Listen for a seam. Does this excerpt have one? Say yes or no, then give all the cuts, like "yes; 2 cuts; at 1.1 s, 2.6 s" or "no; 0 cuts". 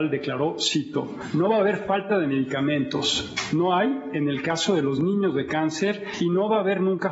no; 0 cuts